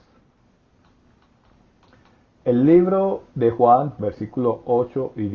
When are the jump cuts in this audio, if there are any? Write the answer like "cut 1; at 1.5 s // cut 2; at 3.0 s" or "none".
cut 1; at 2.3 s // cut 2; at 4.0 s